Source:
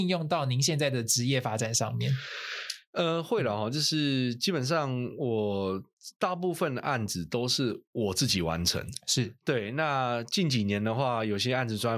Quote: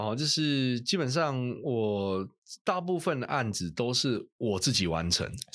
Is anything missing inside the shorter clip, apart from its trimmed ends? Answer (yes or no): no